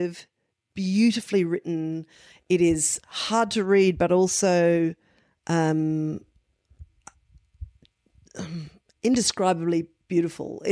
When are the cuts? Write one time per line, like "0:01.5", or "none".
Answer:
0:03.0